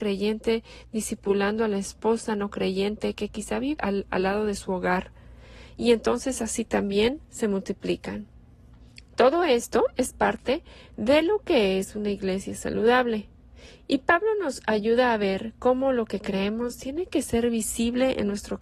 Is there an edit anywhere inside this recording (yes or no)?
yes